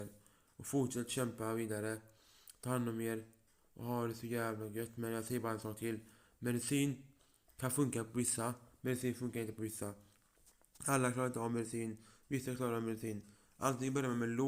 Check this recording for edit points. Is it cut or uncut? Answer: uncut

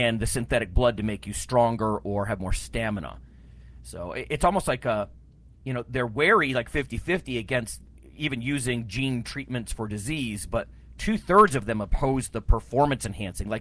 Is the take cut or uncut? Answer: uncut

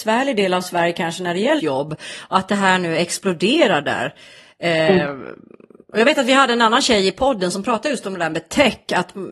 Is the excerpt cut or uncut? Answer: cut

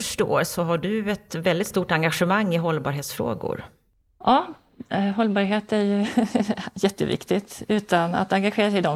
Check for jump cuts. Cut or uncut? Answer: uncut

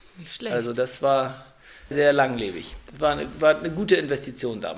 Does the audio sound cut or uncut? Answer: cut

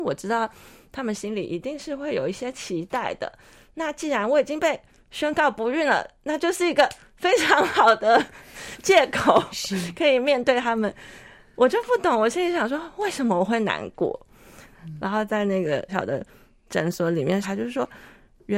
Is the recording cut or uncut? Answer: cut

